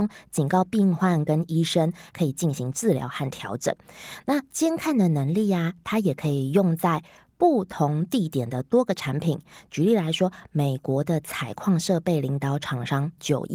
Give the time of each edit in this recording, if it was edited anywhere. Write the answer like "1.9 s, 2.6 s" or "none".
none